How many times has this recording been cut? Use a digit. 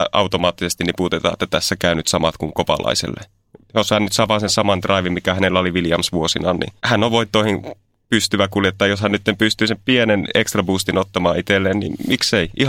2